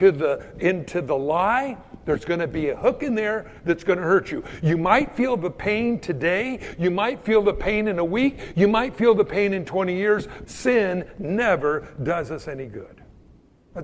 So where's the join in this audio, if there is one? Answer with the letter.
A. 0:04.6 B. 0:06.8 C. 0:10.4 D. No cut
C